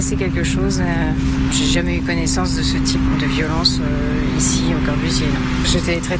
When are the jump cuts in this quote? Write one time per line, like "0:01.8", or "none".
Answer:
none

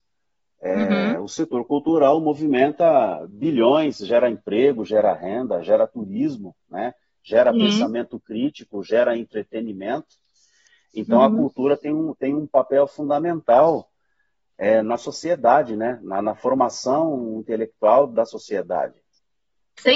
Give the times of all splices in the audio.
none

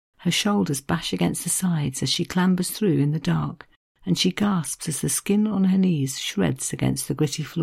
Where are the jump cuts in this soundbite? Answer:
none

